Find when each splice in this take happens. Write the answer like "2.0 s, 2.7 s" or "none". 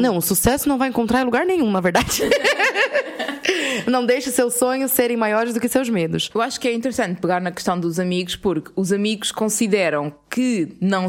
none